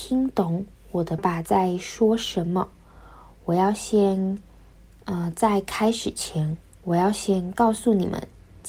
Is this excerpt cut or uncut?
cut